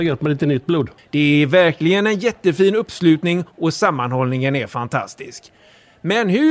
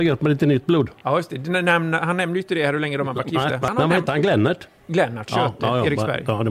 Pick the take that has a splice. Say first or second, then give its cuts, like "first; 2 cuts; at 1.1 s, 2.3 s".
first; 1 cut; at 1.0 s